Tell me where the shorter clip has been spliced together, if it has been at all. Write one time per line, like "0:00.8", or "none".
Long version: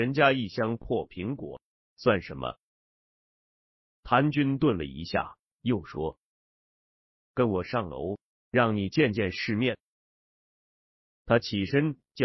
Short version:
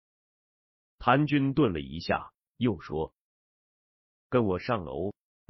none